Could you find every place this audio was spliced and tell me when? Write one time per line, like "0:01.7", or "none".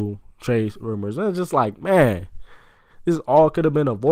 none